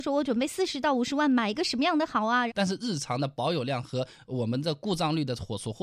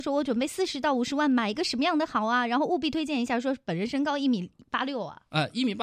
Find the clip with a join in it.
first; 1 cut; at 2.5 s

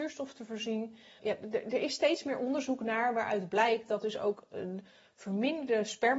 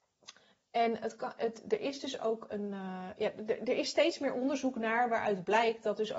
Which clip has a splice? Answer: first; 1 cut; at 1.2 s

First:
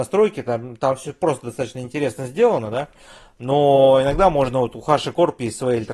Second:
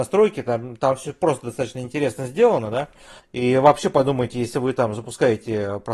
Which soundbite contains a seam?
second; 1 cut; at 3.2 s

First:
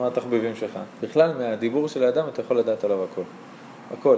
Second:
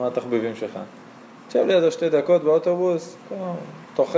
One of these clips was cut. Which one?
first; 1 cut; at 1.0 s

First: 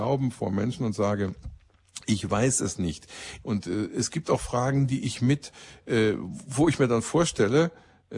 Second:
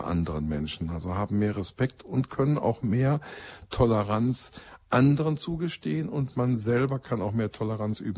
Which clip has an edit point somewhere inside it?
first; 1 cut; at 3.4 s

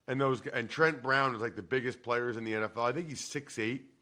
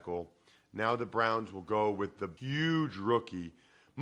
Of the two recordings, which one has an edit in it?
second; 1 cut; at 2.4 s

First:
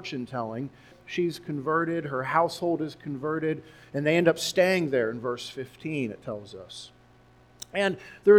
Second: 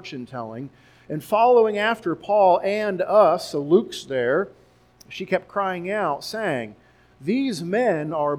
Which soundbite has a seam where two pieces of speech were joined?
first; 1 cut; at 0.9 s

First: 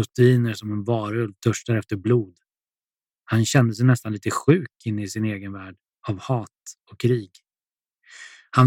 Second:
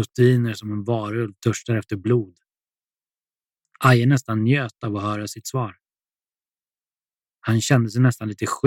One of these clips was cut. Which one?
first; 1 cut; at 3.1 s

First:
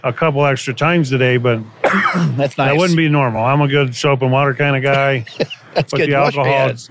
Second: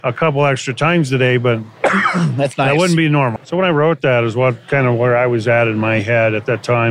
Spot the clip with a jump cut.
second; 1 cut; at 3.4 s

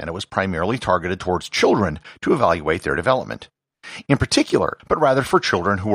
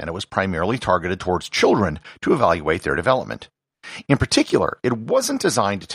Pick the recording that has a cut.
first; 1 cut; at 4.8 s

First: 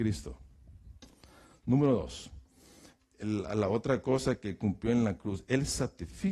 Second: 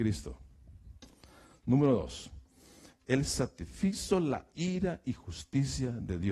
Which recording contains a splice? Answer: second; 1 cut; at 3.0 s

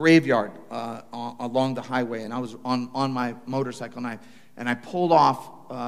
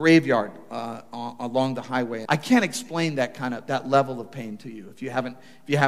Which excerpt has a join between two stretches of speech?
second; 1 cut; at 2.3 s

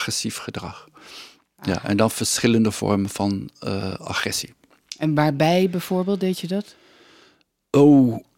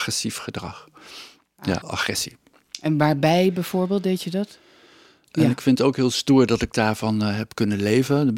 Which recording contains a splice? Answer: second; 2 cuts; at 1.8 s, 5.2 s

